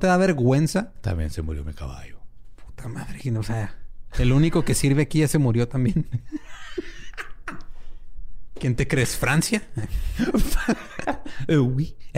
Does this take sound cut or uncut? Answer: uncut